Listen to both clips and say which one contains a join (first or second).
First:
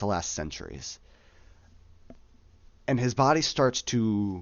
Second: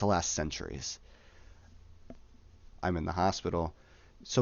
second